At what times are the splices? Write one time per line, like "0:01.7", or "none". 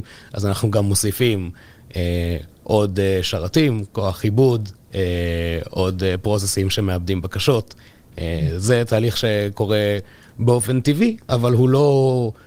0:11.2